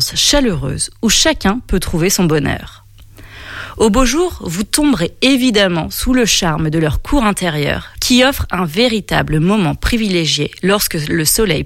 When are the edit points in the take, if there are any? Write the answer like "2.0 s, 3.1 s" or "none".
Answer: 8.0 s